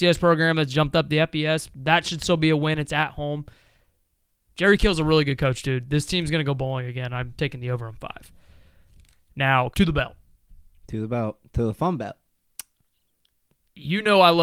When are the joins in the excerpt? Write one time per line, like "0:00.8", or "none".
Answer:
0:09.7